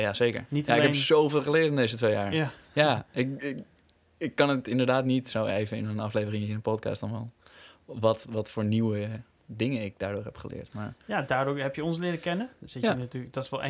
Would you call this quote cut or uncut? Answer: uncut